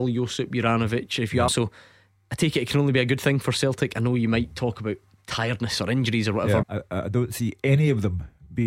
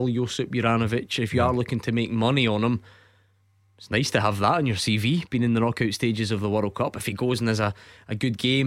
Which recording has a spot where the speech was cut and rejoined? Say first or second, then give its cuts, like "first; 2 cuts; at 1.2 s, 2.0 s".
first; 2 cuts; at 1.5 s, 6.6 s